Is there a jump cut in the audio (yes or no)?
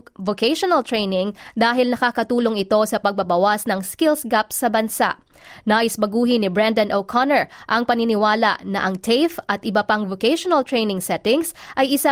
no